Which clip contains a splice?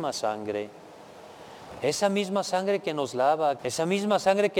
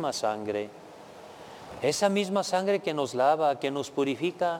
first; 1 cut; at 3.6 s

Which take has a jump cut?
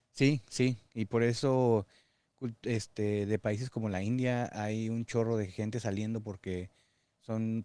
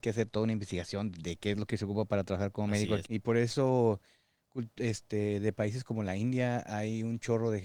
second; 1 cut; at 3.0 s

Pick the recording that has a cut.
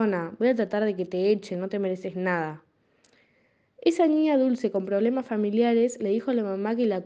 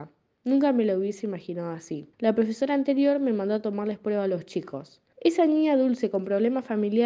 second; 2 cuts; at 2.1 s, 5.1 s

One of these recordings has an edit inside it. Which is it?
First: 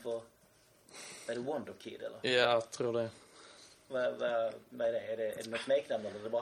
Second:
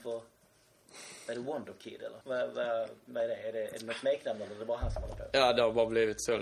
second; 1 cut; at 2.2 s

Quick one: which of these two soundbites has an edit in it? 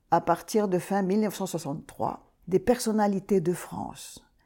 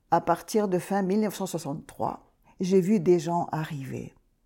first; 1 cut; at 2.4 s

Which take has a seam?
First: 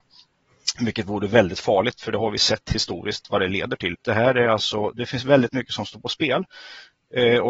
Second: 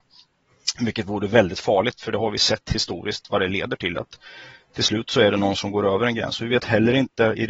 first; 1 cut; at 3.9 s

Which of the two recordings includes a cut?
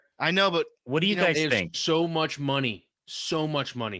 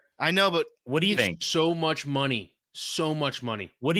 second; 1 cut; at 1.2 s

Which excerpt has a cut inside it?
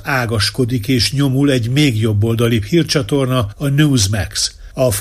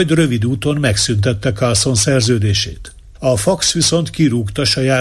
second; 1 cut; at 3.2 s

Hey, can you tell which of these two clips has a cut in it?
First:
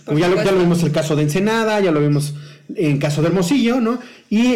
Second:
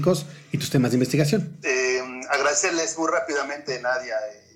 second; 1 cut; at 1.6 s

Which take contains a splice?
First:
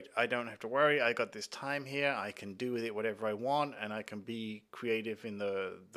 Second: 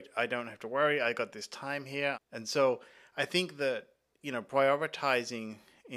second; 1 cut; at 2.1 s

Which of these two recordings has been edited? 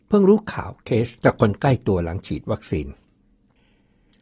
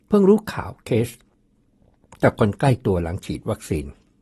first; 1 cut; at 1.2 s

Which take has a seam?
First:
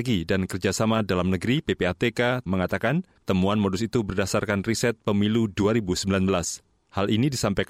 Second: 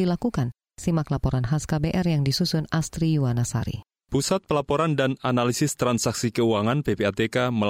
first; 1 cut; at 2.5 s

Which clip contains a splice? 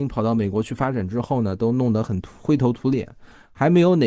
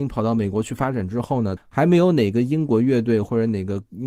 second; 1 cut; at 1.6 s

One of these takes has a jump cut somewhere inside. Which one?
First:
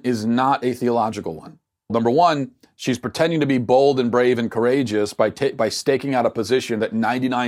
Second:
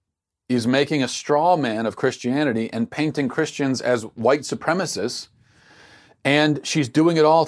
first; 1 cut; at 1.9 s

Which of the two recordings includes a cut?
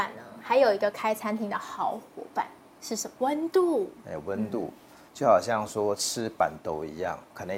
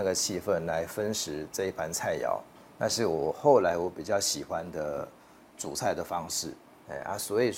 first; 1 cut; at 3.2 s

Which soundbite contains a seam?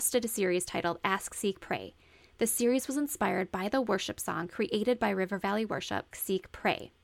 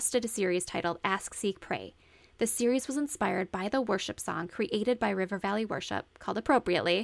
first; 1 cut; at 6.1 s

